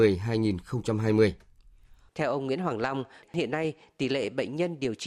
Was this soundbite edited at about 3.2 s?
yes; 2 cuts; at 2.1 s, 3.2 s

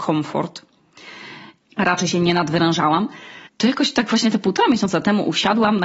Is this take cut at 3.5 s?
yes; 2 cuts; at 1.6 s, 3.5 s

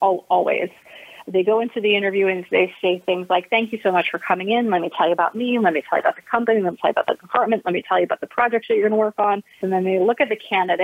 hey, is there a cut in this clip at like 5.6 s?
no; 1 cut; at 9.6 s

